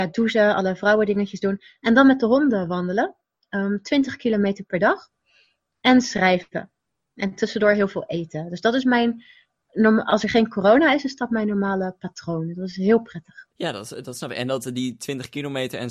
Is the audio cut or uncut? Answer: cut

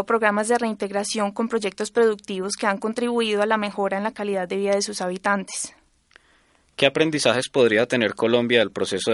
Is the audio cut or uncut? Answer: uncut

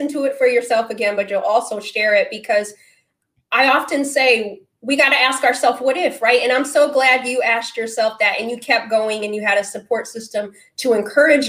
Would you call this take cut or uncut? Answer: uncut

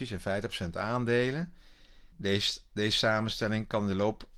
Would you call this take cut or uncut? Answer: cut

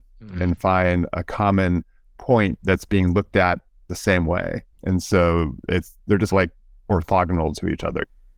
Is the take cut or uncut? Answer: uncut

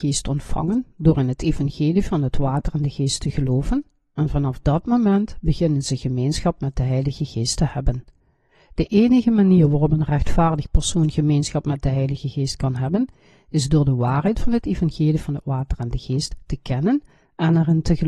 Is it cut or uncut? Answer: uncut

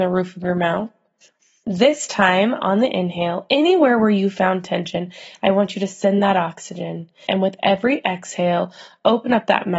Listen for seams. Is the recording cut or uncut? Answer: cut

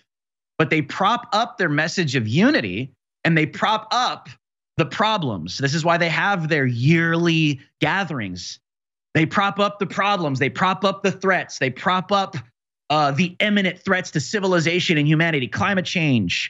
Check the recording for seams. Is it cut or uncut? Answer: uncut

